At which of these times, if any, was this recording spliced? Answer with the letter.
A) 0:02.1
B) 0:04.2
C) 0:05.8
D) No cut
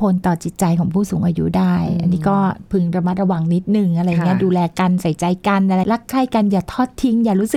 C